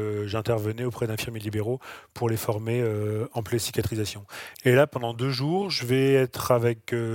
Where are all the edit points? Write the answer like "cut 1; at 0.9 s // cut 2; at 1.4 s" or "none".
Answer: cut 1; at 4.5 s